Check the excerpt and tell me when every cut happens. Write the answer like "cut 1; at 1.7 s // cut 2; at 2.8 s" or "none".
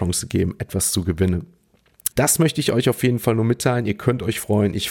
cut 1; at 2.1 s